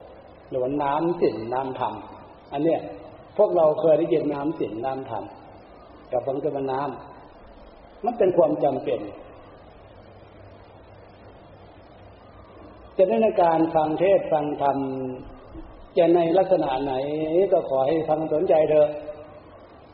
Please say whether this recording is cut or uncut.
cut